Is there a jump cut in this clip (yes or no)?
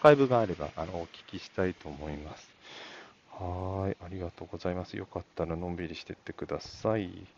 no